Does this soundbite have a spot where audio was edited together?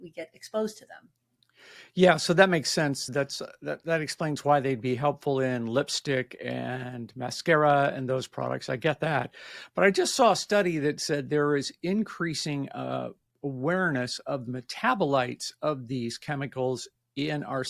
no; 0 cuts

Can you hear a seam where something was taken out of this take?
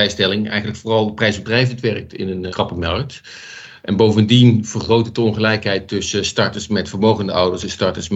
yes; 1 cut; at 2.5 s

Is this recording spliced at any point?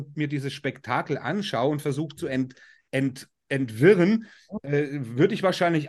no; 0 cuts

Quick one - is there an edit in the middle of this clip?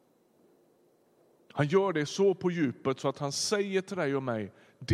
no; 0 cuts

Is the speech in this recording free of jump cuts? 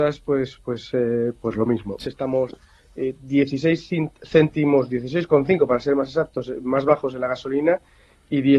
no; 1 cut; at 2.0 s

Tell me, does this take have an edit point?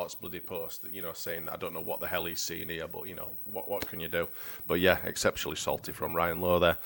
no; 0 cuts

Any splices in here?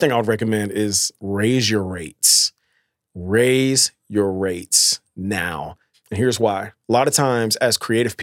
yes; 1 cut; at 5.9 s

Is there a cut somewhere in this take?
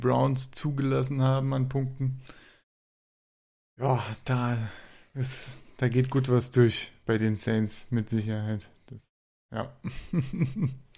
no; 0 cuts

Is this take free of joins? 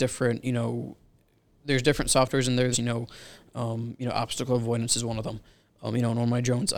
no; 1 cut; at 2.7 s

